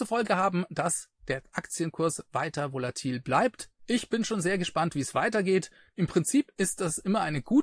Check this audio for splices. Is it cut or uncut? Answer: uncut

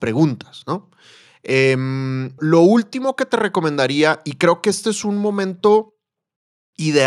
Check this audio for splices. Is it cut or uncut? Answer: cut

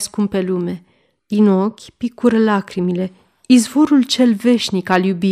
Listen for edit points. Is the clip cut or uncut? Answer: cut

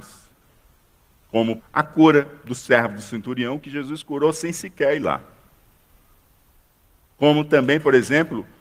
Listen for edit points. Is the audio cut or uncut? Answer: cut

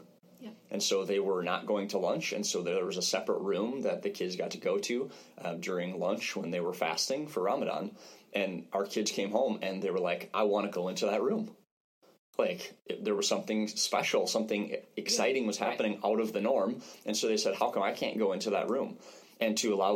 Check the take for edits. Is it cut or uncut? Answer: uncut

